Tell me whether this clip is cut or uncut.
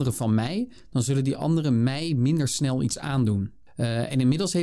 cut